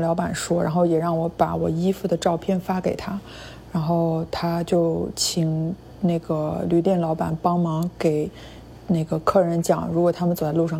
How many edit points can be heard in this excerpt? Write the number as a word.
zero